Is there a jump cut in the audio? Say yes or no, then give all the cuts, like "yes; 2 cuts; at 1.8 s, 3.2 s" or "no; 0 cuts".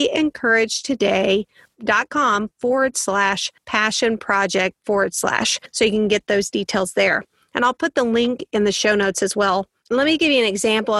no; 0 cuts